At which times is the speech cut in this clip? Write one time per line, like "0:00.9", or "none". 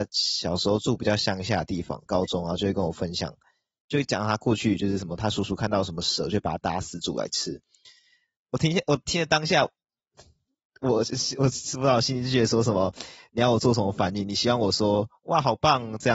0:02.1